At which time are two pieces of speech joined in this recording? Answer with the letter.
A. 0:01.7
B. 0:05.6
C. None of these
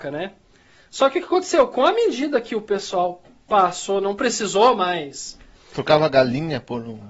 B